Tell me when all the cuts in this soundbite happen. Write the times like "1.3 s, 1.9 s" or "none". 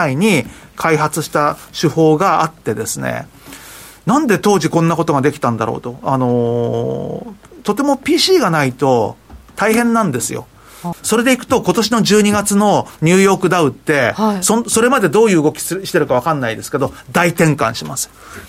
10.9 s